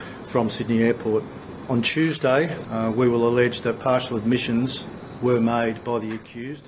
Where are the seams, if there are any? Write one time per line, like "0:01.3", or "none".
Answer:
0:02.6